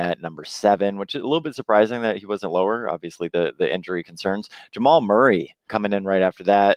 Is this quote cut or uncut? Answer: cut